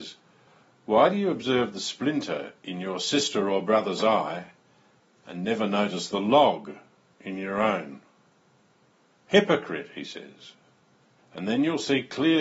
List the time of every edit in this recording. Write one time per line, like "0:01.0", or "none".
0:09.1
0:11.2